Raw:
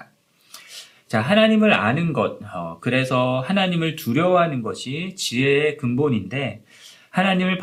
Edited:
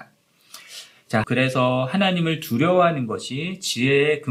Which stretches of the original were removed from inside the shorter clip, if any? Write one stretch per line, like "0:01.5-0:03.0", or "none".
0:01.2-0:02.8